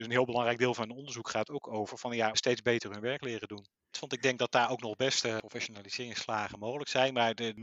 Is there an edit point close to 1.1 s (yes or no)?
no